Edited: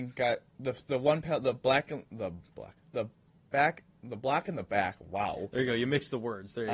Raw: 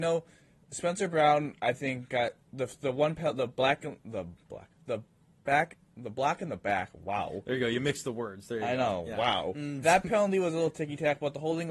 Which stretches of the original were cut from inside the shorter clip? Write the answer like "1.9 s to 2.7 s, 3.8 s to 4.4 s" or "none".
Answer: none